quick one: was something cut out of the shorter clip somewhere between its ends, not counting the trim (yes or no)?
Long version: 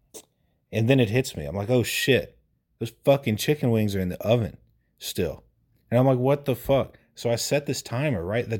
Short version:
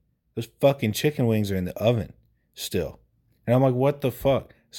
no